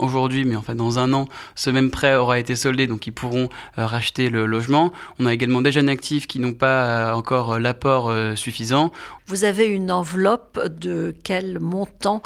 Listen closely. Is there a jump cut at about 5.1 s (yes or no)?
no